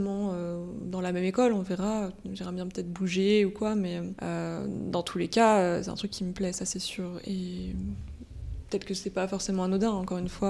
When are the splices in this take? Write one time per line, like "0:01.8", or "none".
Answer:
none